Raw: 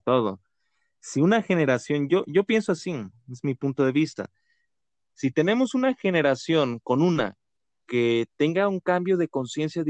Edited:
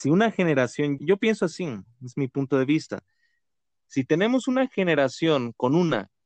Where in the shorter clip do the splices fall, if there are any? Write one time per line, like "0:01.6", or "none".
0:01.0